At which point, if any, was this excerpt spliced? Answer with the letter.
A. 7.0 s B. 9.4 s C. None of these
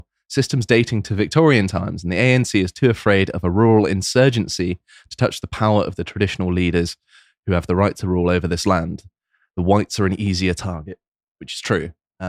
C